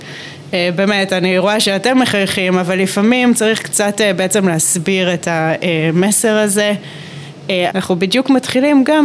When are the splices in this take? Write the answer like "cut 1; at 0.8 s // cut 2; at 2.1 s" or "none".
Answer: cut 1; at 7.7 s